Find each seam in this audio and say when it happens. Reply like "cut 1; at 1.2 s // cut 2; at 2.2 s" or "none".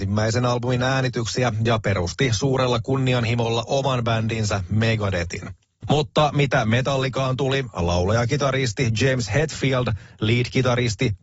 cut 1; at 5.8 s